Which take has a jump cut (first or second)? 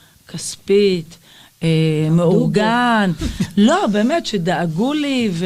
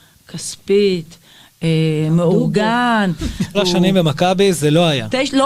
second